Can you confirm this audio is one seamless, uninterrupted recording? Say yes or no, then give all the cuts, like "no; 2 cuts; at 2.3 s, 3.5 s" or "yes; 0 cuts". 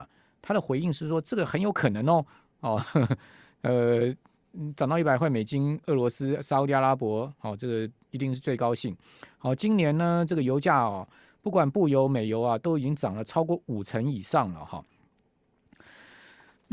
yes; 0 cuts